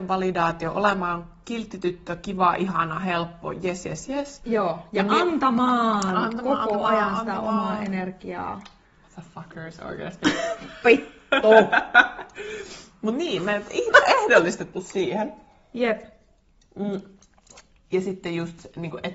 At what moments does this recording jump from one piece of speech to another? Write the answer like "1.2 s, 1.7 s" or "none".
none